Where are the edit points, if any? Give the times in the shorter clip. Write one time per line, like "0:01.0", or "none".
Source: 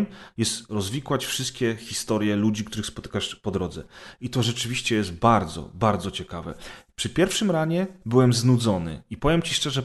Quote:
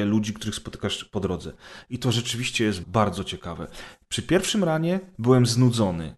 0:02.8